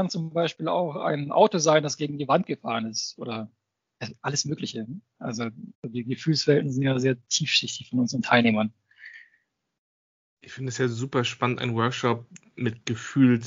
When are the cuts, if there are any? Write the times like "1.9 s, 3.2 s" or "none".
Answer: 5.7 s